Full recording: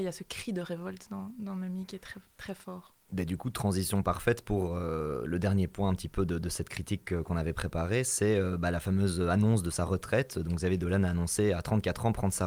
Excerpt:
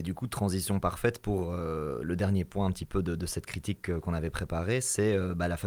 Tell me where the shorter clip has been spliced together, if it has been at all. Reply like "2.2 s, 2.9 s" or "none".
none